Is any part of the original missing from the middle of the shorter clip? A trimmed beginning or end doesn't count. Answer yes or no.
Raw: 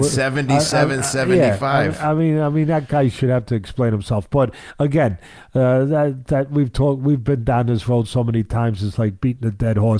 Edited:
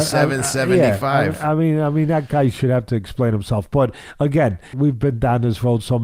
yes